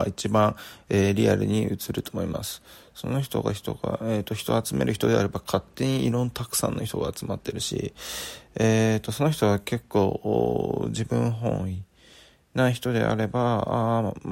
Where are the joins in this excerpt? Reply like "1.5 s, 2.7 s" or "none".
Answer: none

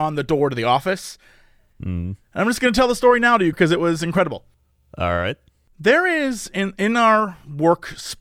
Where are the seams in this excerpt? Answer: 3.5 s

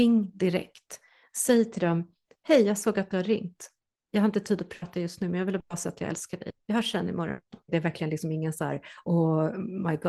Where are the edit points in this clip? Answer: 7.7 s

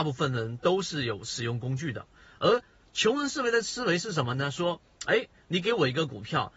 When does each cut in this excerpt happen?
none

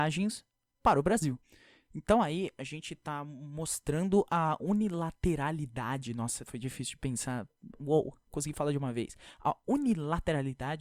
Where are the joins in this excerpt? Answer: none

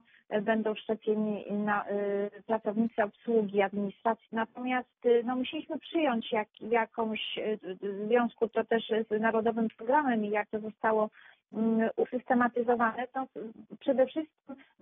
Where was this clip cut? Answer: 4.3 s

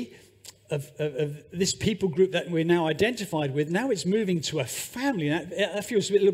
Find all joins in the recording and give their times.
none

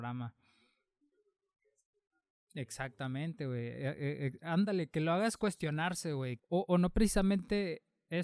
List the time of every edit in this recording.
6.4 s

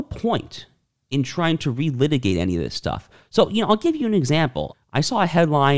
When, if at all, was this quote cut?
4.7 s

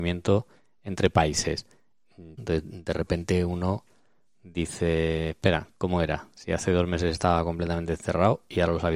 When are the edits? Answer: 2.4 s

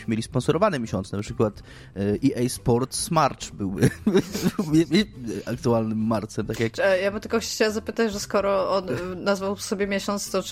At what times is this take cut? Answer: none

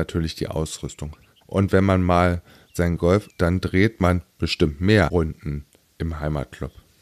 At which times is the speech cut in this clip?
1.4 s, 3.3 s

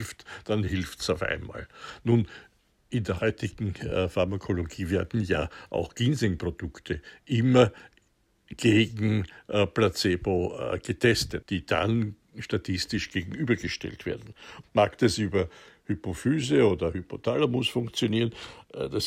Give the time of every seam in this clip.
11.4 s, 14.6 s

